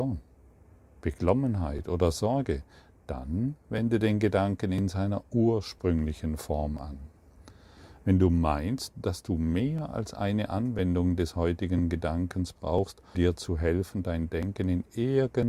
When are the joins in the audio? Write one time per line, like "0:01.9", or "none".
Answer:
0:13.2